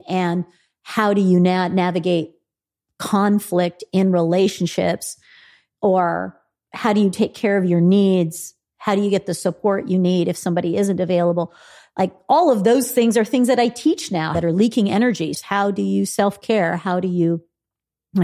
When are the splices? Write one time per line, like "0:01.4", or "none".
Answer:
0:14.3
0:15.3